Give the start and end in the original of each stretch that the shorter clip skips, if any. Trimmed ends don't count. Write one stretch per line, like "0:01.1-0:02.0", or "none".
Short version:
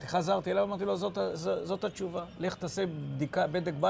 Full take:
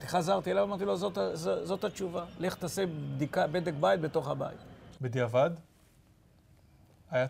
none